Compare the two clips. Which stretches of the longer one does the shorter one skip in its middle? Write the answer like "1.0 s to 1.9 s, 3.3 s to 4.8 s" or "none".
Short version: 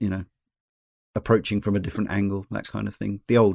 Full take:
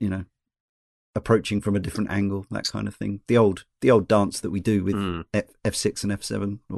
none